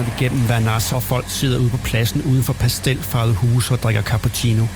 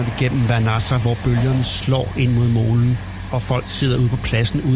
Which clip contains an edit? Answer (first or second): first